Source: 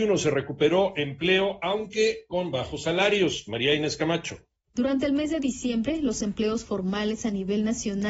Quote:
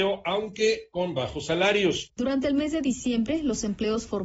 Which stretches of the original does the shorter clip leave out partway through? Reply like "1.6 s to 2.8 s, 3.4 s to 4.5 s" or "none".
3.4 s to 4.7 s